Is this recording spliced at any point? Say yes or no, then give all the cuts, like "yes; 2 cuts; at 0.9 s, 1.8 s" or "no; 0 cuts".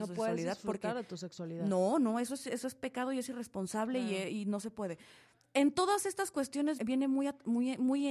yes; 1 cut; at 6.8 s